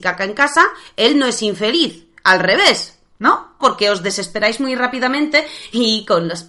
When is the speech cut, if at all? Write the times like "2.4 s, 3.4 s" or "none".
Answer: 3.6 s